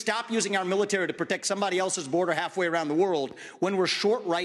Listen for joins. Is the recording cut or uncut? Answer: uncut